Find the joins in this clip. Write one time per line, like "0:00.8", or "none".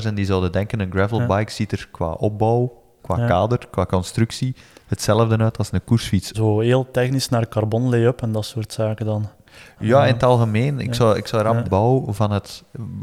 0:06.3
0:11.6